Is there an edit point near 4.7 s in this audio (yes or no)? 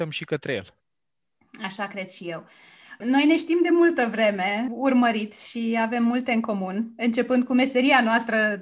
yes